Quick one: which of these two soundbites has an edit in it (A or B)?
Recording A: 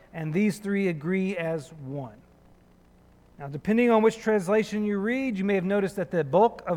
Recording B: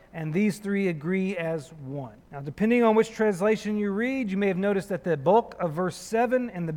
B